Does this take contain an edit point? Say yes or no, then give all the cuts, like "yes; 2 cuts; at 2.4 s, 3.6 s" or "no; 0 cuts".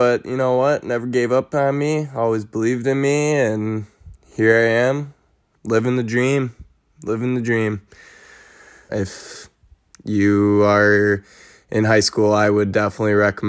yes; 1 cut; at 8.9 s